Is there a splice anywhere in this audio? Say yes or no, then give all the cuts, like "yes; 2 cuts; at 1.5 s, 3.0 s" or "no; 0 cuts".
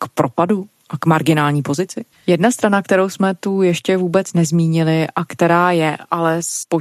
yes; 1 cut; at 2.1 s